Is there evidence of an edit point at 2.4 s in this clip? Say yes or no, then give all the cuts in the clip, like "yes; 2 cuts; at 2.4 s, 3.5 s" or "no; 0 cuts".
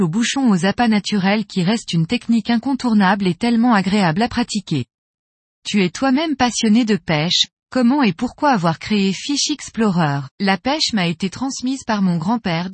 no; 2 cuts; at 5.5 s, 10.3 s